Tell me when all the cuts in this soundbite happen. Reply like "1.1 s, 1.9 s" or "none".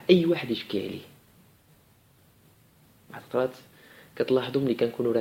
none